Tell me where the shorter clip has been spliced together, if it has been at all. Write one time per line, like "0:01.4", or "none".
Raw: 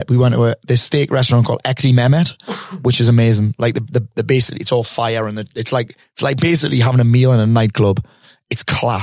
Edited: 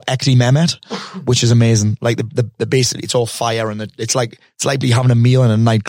0:04.8